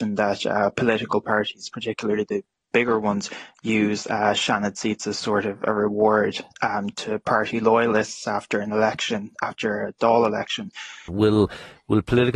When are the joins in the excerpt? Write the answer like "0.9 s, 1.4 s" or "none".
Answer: 11.1 s